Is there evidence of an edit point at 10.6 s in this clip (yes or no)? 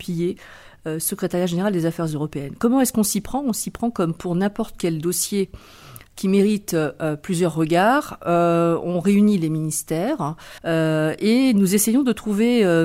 yes